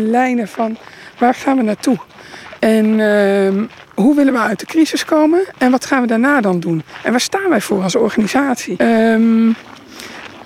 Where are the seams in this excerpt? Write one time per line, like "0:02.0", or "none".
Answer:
0:08.8